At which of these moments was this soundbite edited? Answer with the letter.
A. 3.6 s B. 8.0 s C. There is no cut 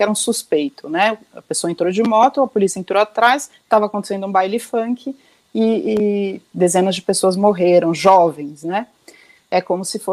C